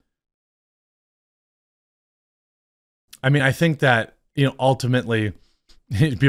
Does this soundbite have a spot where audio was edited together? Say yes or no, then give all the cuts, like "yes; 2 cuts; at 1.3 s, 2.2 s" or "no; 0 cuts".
no; 0 cuts